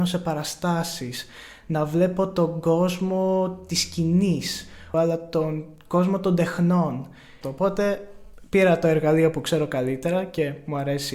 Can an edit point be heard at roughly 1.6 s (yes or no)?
no